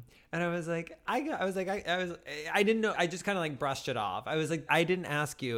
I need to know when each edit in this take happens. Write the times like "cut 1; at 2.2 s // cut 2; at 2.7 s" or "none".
cut 1; at 2.9 s // cut 2; at 4.7 s